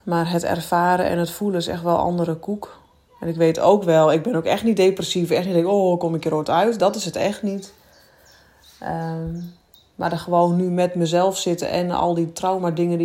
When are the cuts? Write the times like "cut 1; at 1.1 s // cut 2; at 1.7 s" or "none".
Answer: none